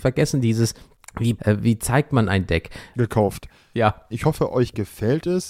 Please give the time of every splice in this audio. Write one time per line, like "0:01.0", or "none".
0:01.4
0:02.9
0:04.1